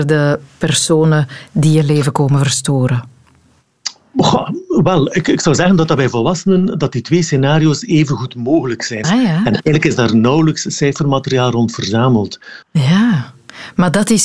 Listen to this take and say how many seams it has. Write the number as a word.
two